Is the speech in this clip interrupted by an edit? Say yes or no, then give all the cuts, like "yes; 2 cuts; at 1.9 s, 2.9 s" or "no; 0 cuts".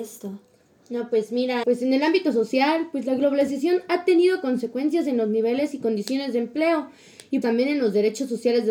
yes; 2 cuts; at 1.6 s, 7.4 s